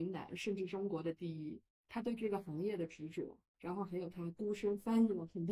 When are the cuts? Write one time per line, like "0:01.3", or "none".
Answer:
none